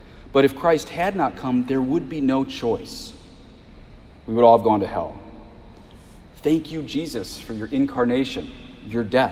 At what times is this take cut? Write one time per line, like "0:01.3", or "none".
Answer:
none